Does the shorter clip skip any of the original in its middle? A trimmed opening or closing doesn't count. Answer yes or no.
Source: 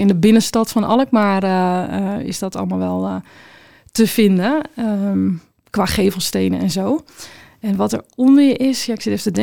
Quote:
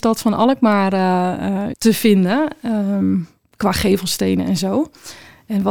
yes